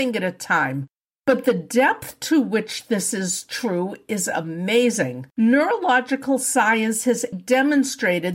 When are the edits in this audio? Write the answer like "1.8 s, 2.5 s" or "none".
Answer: 5.3 s, 7.3 s